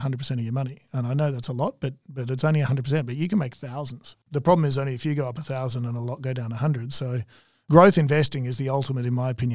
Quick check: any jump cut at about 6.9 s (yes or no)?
no